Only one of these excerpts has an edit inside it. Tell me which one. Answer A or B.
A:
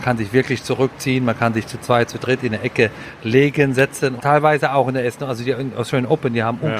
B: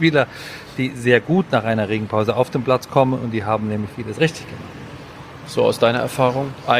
A